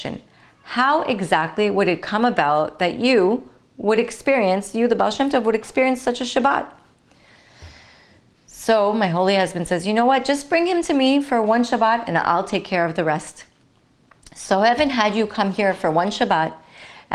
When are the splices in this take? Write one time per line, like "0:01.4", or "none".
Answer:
none